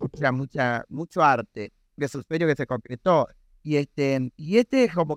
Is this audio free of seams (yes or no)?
no